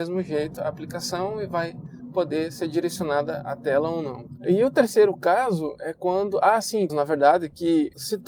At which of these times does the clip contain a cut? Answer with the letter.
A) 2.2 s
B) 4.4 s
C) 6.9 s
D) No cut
C